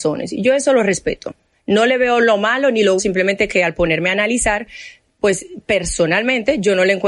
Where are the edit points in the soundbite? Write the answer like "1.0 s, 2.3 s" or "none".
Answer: 3.0 s

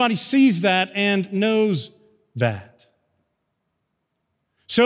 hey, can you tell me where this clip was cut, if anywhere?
none

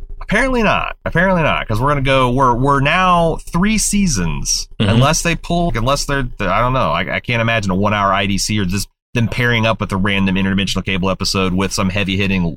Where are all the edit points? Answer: 5.7 s

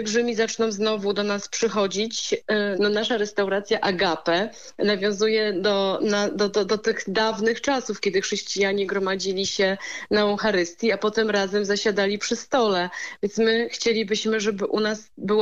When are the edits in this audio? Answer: 2.7 s

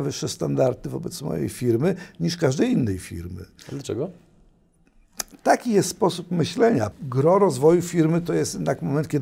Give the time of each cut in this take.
6.9 s

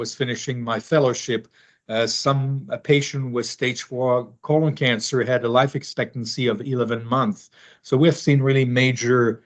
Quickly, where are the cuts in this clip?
7.8 s

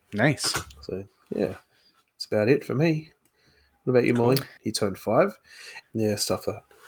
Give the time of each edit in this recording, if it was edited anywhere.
4.6 s, 5.8 s

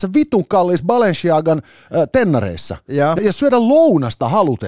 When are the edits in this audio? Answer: 3.2 s

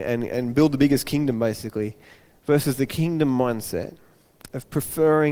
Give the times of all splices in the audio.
none

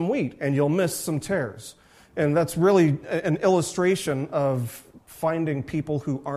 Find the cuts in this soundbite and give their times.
none

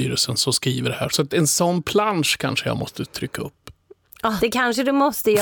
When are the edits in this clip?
1.1 s, 4.4 s

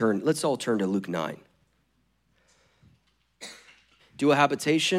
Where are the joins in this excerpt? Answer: 4.0 s

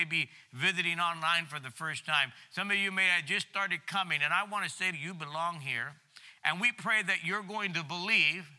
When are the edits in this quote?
4.9 s

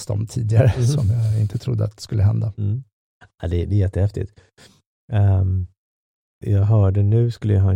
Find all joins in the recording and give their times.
6.4 s

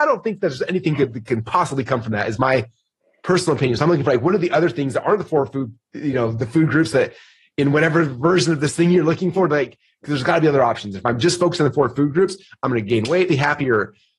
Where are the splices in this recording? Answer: 13.3 s

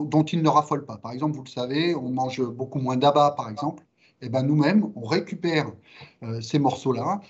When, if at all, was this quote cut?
none

